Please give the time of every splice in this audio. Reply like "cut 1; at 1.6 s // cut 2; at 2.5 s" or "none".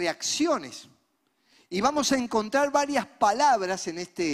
none

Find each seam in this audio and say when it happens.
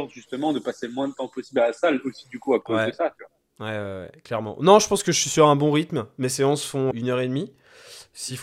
cut 1; at 6.9 s

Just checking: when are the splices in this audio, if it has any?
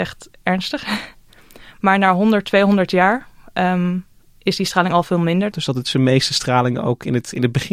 cut 1; at 5.5 s

